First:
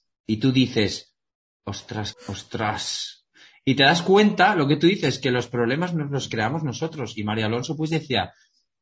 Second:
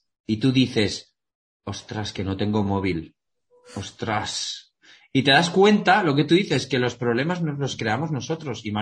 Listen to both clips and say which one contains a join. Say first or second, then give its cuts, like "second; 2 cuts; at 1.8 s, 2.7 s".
first; 1 cut; at 2.1 s